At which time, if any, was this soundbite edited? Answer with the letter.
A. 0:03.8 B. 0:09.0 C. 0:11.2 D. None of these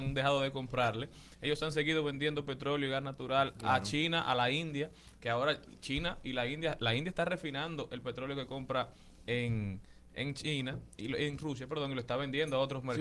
D